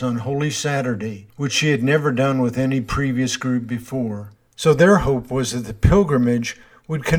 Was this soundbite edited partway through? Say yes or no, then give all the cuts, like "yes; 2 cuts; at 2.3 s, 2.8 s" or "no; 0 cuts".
yes; 1 cut; at 4.4 s